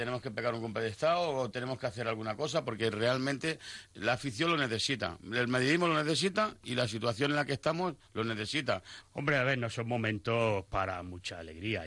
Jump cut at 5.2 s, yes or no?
no